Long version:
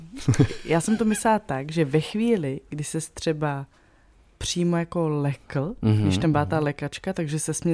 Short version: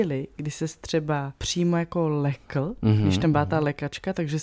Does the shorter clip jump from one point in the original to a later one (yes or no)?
yes